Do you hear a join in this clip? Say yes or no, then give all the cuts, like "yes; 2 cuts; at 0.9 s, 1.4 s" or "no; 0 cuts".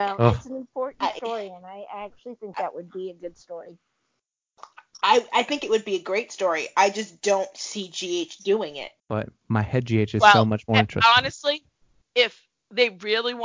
yes; 1 cut; at 9.0 s